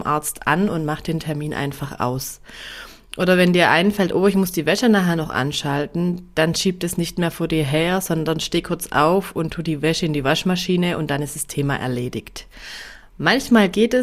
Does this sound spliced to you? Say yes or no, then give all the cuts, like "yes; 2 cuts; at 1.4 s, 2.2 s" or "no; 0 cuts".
no; 0 cuts